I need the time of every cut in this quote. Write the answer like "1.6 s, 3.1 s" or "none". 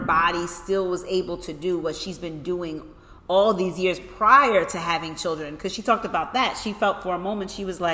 none